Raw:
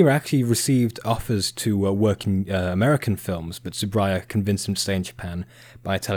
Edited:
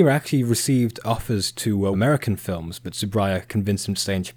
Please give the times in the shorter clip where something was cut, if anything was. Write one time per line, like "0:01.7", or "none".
0:01.9